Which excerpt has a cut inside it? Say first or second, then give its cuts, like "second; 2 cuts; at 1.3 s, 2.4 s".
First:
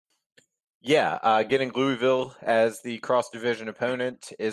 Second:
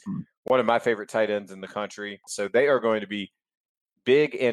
second; 1 cut; at 2.3 s